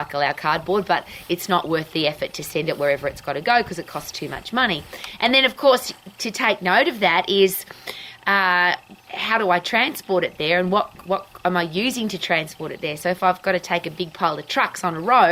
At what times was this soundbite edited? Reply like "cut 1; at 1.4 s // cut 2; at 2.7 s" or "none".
cut 1; at 9.0 s